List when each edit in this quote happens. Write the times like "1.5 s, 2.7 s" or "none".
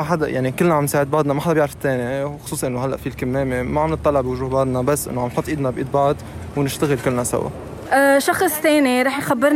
7.8 s